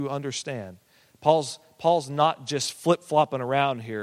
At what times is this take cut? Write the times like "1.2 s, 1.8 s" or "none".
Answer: none